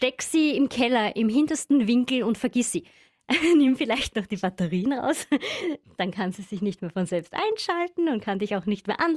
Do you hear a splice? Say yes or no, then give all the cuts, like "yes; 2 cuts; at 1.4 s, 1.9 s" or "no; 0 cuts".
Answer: no; 0 cuts